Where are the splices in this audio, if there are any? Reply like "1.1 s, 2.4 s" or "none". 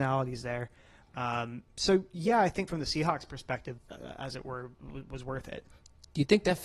2.7 s, 3.8 s